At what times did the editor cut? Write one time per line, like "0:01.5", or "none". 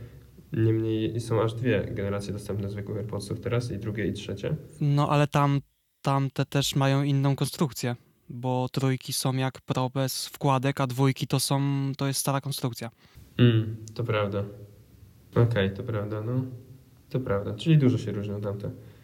none